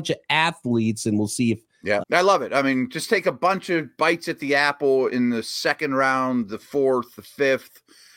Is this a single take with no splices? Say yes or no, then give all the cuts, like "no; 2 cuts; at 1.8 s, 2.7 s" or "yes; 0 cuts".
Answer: no; 1 cut; at 2.0 s